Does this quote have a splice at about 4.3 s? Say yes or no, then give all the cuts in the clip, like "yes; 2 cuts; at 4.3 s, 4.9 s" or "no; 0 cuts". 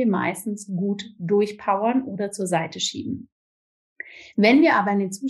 no; 0 cuts